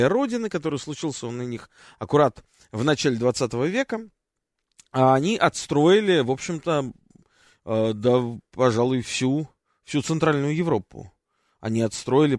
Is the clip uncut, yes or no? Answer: yes